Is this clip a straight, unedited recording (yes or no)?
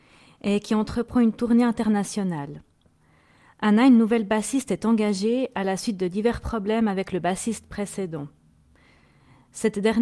yes